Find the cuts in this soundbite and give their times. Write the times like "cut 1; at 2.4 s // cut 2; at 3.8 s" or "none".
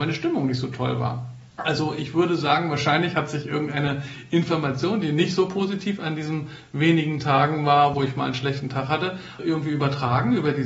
cut 1; at 1.5 s // cut 2; at 7.9 s // cut 3; at 9.4 s